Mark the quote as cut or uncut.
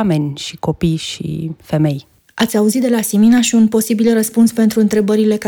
uncut